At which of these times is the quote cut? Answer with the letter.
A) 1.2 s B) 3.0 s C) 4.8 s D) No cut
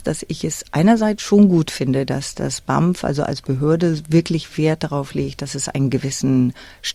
D